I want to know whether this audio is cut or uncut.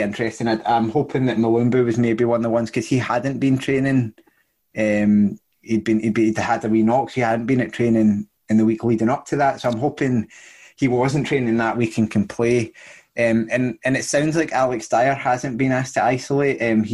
uncut